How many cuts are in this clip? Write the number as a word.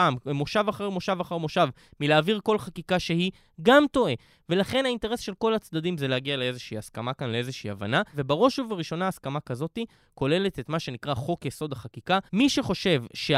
one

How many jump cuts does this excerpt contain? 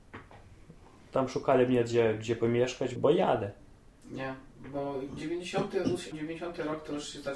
two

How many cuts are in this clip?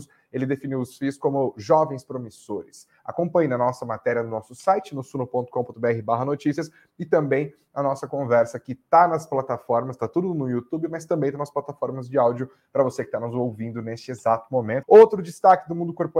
one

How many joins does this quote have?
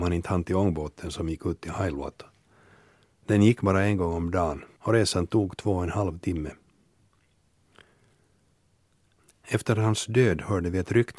one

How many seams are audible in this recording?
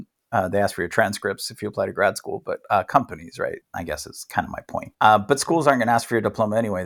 two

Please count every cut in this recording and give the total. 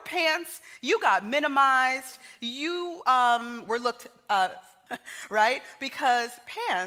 one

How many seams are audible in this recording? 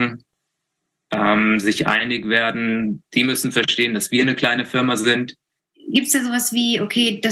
one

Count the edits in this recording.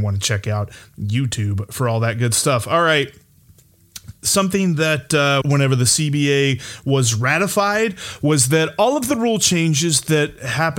one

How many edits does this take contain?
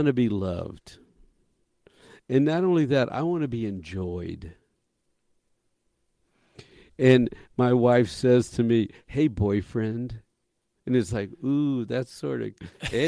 zero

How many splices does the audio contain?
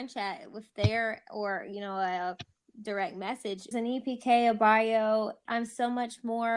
two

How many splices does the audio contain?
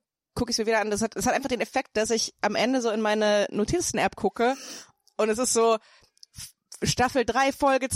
zero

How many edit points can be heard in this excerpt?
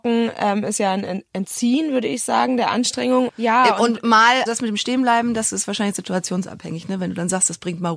two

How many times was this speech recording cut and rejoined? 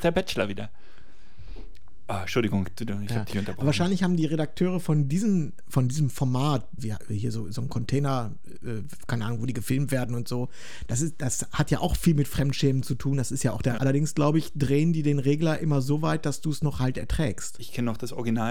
three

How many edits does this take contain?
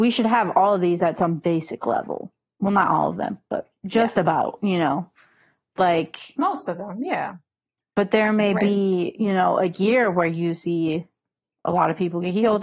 one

